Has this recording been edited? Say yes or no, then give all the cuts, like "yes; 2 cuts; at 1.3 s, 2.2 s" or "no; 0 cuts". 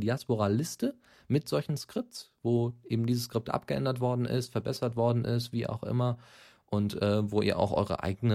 no; 0 cuts